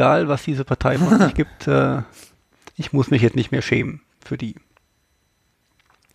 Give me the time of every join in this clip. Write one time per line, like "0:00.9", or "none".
none